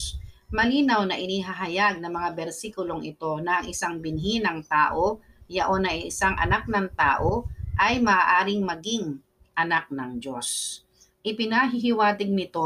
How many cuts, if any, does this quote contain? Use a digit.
0